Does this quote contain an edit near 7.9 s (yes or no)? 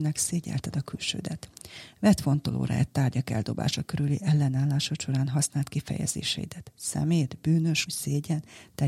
yes